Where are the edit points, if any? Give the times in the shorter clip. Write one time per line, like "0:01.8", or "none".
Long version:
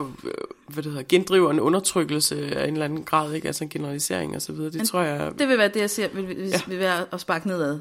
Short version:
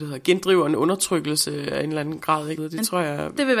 0:02.6